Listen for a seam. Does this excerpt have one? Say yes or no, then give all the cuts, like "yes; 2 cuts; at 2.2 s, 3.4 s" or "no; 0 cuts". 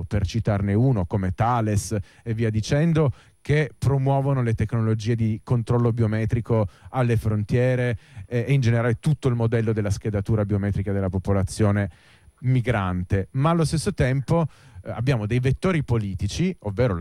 no; 0 cuts